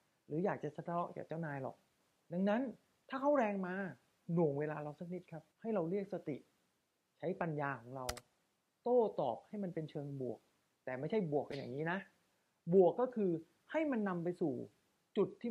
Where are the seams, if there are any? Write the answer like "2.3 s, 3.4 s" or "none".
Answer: 5.5 s